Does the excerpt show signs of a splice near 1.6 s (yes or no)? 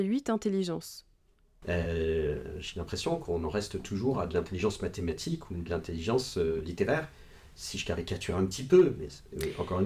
yes